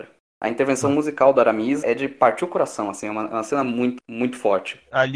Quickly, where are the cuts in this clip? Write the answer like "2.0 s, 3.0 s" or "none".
1.8 s, 4.0 s